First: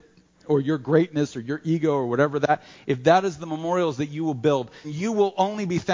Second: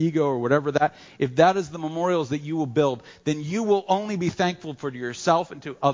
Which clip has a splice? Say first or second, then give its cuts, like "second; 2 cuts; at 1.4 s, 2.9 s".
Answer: first; 1 cut; at 4.8 s